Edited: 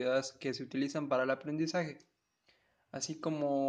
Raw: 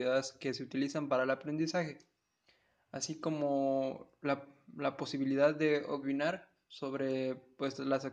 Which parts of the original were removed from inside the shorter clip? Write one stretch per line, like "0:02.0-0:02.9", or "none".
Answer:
none